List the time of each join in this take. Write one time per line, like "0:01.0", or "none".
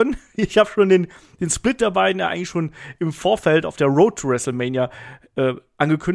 none